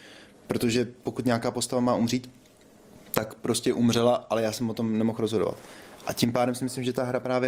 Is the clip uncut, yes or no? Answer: yes